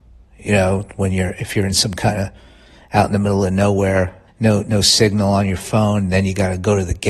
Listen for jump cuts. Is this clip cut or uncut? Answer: cut